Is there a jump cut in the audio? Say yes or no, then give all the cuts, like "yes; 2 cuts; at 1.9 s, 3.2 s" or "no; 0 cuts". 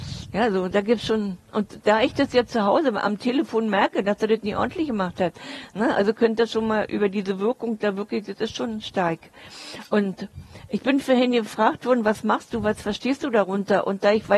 no; 0 cuts